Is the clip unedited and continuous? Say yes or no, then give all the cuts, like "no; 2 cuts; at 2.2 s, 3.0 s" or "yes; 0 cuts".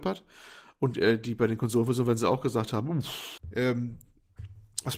yes; 0 cuts